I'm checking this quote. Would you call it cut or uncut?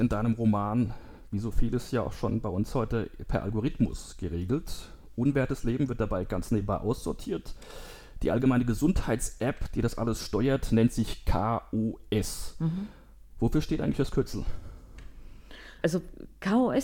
cut